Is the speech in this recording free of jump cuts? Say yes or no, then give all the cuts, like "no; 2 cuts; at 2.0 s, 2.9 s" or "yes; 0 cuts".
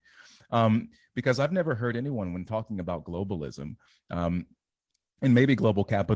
yes; 0 cuts